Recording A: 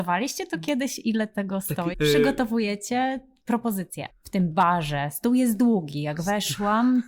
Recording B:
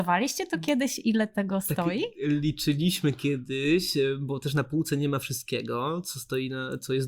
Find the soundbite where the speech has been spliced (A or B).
A